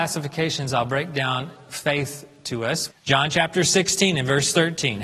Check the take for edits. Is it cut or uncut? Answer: cut